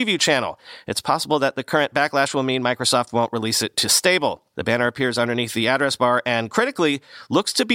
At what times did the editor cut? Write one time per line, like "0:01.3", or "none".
0:04.5